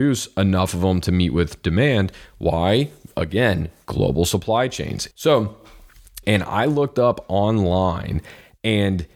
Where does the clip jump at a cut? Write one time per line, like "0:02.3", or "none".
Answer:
0:05.1
0:06.2

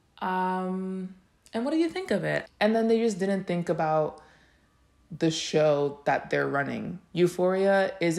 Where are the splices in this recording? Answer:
0:02.5

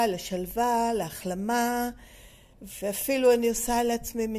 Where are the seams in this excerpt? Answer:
0:02.5

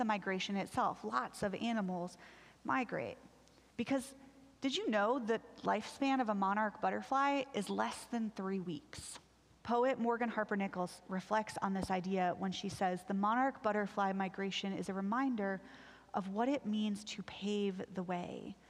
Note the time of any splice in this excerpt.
0:03.7
0:09.6

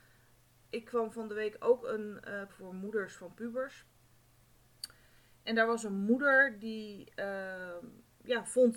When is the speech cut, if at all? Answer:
0:02.5

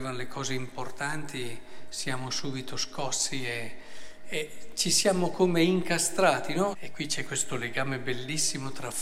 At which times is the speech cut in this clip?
0:06.7

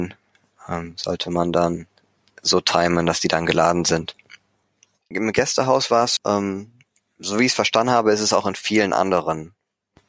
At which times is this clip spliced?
0:05.1
0:06.2

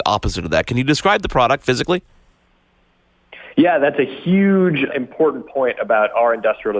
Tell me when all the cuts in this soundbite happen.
0:04.9

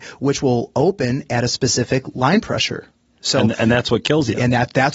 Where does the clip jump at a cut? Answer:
none

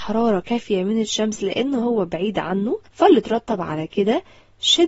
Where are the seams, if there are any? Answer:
0:02.9

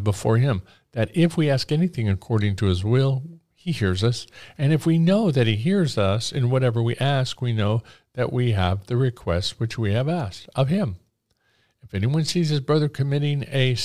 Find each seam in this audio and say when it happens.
none

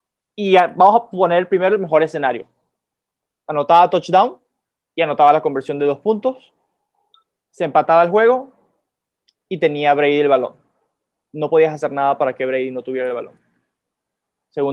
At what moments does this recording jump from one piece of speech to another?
none

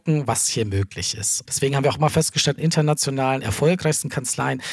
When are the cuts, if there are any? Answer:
0:01.5
0:02.6

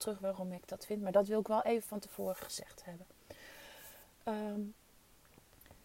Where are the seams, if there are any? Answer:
none

